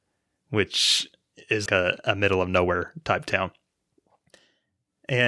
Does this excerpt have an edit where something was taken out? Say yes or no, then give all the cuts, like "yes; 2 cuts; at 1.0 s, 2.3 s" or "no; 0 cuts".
yes; 1 cut; at 1.7 s